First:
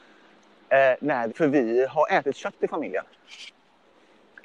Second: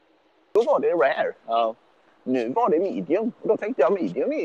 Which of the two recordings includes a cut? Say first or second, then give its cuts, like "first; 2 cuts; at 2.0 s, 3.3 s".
first; 1 cut; at 1.3 s